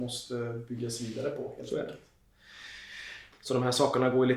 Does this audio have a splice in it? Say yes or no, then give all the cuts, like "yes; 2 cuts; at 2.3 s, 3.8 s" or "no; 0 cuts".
yes; 1 cut; at 3.3 s